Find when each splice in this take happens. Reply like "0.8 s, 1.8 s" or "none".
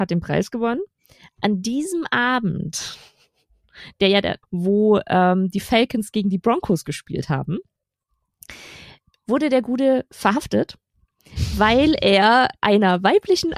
4.4 s